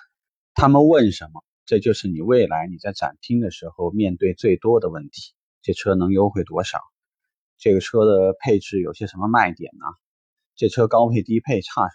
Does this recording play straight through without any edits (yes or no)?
no